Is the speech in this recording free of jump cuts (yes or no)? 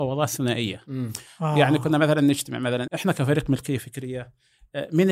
no